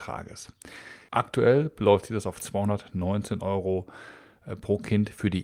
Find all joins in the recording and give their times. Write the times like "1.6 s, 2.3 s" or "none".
1.1 s